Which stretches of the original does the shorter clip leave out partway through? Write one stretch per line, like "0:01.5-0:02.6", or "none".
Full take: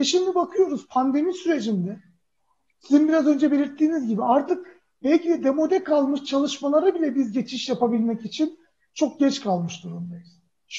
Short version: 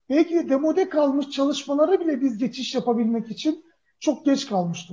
none